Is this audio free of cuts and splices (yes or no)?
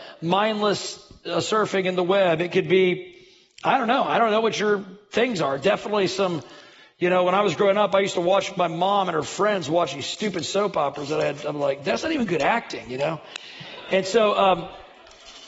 yes